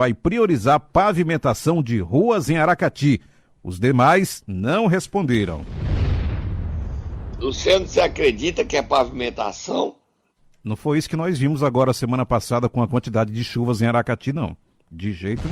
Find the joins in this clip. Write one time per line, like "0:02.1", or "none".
none

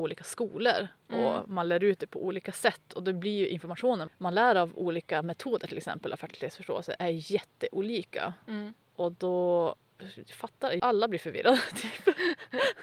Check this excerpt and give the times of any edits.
0:04.1
0:10.8

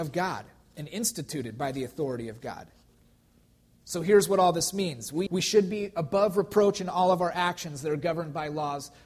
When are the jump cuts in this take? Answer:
0:03.8
0:05.3

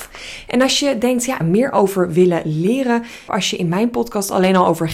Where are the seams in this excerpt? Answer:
0:01.4
0:03.3

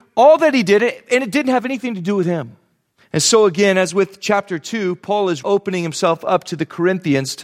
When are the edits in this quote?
0:03.0
0:05.4

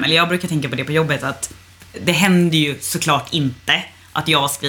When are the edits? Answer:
0:01.9

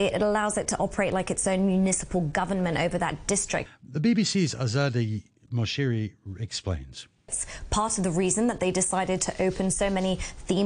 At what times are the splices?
0:03.7
0:07.3

